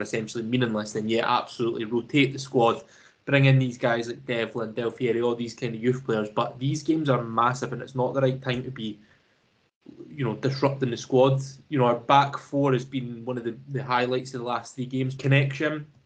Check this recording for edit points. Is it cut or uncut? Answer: cut